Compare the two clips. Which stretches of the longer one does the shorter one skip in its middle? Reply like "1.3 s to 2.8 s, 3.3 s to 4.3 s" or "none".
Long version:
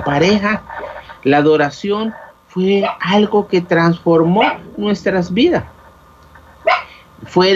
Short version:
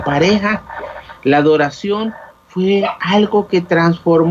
none

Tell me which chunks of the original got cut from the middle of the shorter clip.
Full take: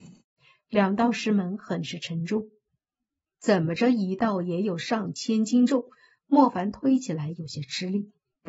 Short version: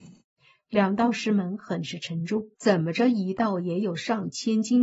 2.5 s to 3.4 s

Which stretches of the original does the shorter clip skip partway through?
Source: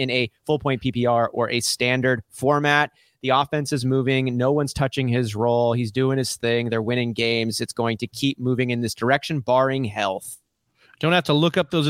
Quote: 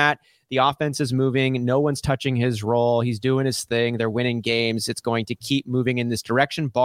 none

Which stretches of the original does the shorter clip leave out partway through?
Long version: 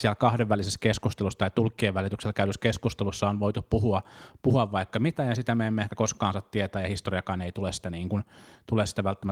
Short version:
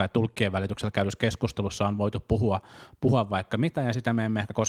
none

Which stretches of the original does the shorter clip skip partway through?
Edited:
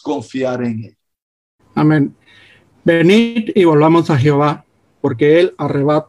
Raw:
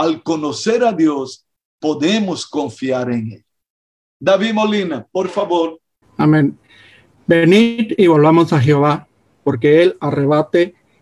4.1 s to 6.0 s

